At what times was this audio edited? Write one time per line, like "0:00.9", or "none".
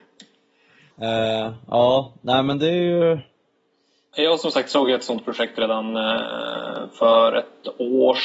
0:00.9